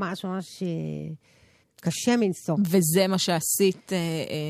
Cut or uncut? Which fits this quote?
cut